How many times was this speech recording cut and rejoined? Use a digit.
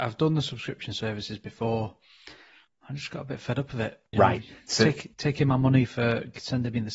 1